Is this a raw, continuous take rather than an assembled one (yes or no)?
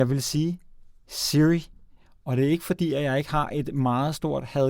yes